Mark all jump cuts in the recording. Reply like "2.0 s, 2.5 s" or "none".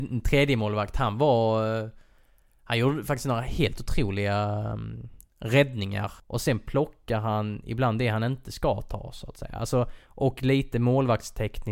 6.2 s